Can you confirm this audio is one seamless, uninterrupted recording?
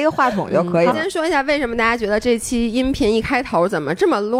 no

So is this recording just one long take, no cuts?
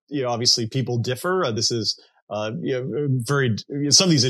yes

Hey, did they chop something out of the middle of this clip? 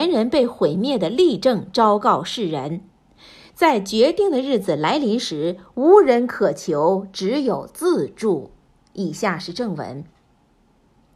no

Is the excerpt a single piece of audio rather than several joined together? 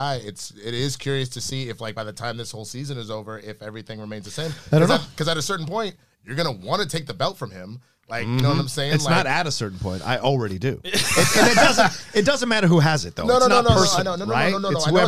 yes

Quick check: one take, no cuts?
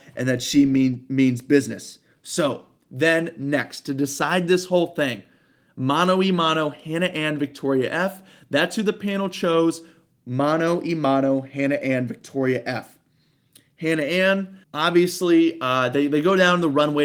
no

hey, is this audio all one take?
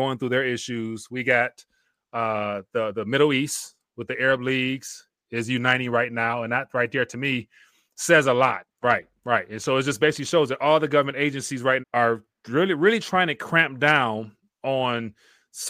no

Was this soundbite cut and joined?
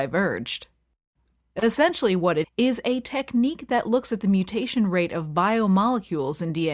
yes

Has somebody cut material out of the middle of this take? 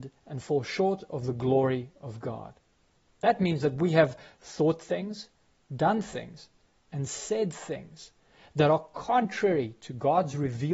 no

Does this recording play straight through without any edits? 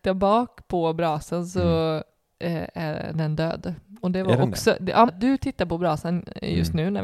no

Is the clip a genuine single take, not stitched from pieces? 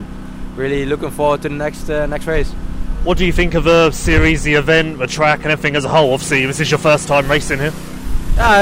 yes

